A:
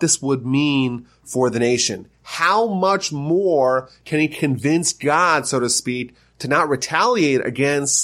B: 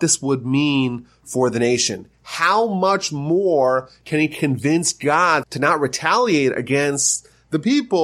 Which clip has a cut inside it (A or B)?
B